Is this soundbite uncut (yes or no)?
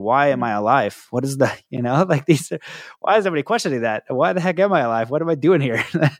yes